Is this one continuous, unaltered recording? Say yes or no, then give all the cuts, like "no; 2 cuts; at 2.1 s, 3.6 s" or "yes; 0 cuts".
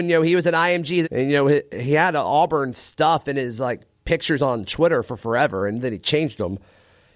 no; 1 cut; at 1.0 s